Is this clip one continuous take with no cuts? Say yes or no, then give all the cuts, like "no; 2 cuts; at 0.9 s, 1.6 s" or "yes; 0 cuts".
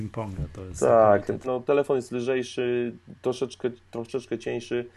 no; 1 cut; at 1.4 s